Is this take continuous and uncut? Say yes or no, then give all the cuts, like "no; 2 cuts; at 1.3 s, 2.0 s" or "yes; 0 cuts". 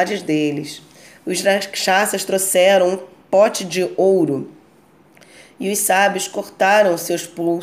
yes; 0 cuts